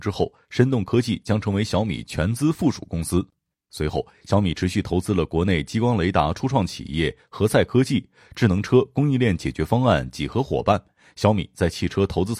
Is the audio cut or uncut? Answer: cut